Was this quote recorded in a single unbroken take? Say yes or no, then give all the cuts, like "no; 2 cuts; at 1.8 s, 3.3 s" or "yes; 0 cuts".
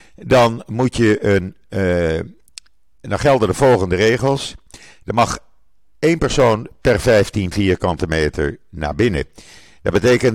yes; 0 cuts